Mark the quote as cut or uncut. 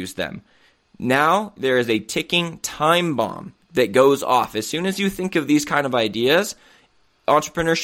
cut